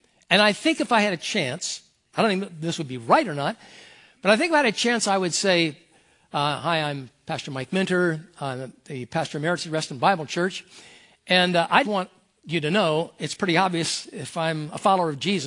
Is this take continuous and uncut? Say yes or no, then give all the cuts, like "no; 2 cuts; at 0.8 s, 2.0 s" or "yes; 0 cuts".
no; 1 cut; at 11.8 s